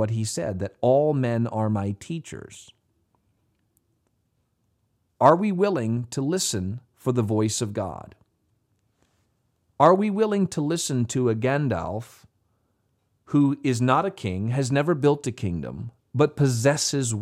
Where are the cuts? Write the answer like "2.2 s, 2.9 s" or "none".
6.8 s